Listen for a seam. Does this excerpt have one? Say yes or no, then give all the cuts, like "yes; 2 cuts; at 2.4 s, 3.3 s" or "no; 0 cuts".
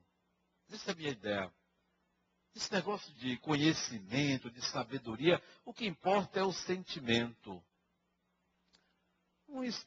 yes; 1 cut; at 3.1 s